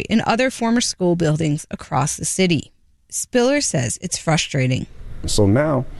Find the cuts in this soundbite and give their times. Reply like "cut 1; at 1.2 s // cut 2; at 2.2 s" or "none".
none